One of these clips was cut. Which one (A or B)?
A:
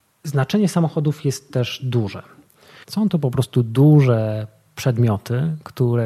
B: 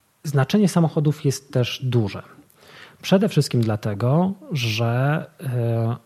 A